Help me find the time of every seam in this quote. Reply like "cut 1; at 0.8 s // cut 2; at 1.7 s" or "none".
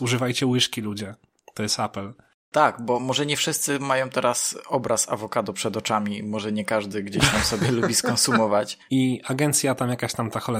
cut 1; at 8.9 s